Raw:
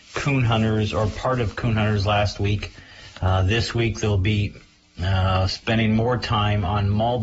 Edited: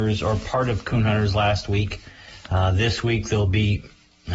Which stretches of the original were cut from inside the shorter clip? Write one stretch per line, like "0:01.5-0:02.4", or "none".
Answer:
none